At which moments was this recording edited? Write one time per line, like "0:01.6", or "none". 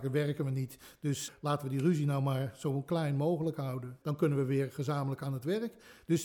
0:01.3
0:04.0